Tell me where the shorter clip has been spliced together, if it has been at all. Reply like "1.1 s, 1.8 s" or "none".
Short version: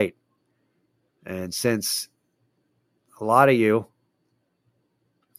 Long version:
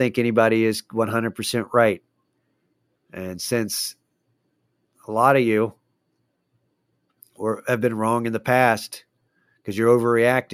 none